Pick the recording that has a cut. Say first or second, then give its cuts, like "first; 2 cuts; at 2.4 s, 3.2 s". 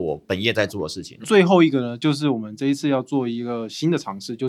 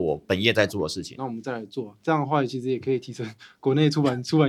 second; 1 cut; at 1.2 s